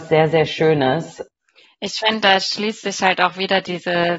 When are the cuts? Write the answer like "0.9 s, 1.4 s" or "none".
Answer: none